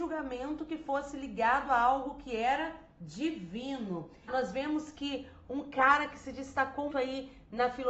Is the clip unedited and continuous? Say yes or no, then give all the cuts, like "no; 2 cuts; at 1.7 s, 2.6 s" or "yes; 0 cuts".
no; 2 cuts; at 4.3 s, 6.9 s